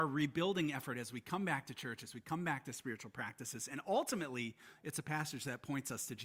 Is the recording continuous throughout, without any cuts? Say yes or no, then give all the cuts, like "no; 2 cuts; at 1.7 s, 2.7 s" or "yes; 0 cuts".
yes; 0 cuts